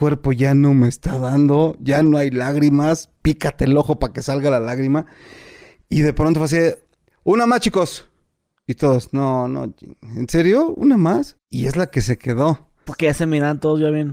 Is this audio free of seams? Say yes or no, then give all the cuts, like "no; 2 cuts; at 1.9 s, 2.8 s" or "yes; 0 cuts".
no; 2 cuts; at 11.4 s, 12.9 s